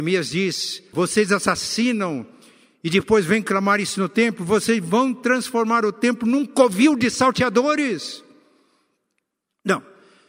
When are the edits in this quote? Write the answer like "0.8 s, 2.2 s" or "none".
0.9 s

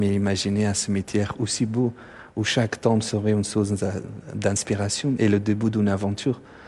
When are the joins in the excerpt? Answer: none

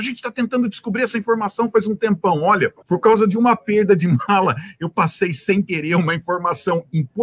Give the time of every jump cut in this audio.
2.8 s

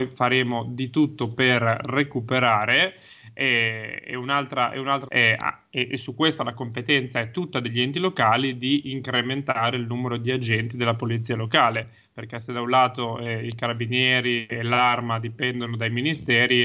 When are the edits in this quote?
5.1 s

